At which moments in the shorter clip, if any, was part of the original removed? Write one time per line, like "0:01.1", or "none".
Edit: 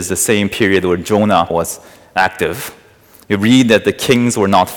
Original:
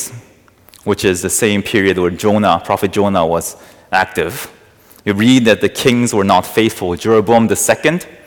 0:01.5